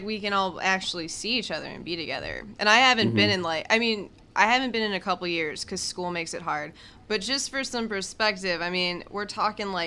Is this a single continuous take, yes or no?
yes